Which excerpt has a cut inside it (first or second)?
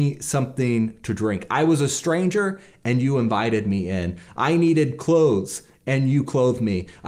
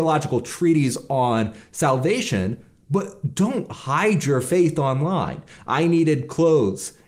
second